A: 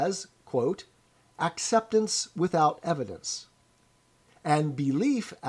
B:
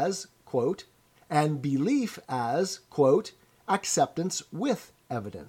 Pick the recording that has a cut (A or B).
B